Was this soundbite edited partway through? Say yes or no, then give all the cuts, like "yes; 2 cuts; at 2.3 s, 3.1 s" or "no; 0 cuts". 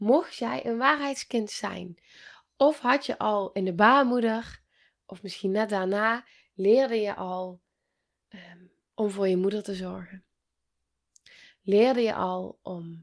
no; 0 cuts